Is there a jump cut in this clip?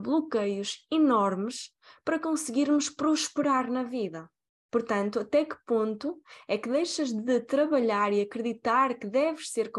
yes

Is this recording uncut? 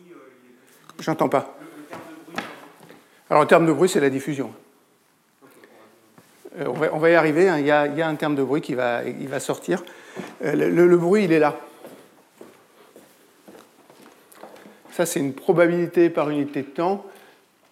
yes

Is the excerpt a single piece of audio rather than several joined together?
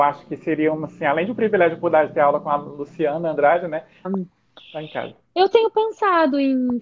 no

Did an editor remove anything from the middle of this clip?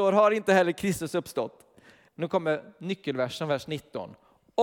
yes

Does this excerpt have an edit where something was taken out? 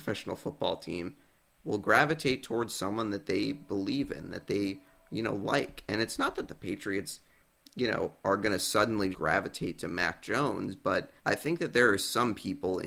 yes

